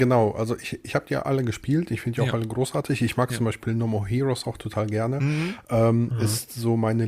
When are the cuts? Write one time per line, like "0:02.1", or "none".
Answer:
none